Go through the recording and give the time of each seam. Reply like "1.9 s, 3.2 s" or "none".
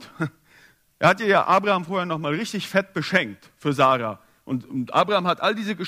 none